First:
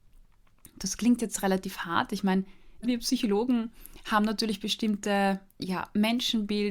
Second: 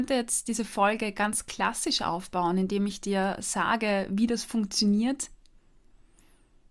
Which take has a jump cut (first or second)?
first